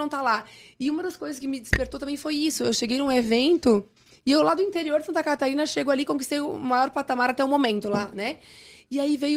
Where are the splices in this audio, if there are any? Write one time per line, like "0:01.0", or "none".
none